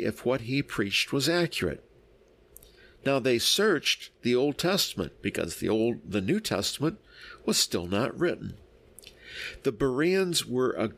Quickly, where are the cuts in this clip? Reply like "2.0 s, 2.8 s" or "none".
none